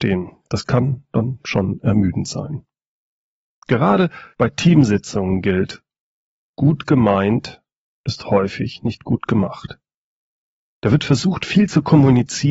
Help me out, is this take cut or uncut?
uncut